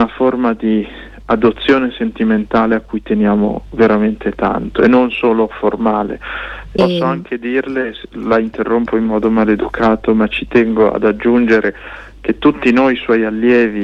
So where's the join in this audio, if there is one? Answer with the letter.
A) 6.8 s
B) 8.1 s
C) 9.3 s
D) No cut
A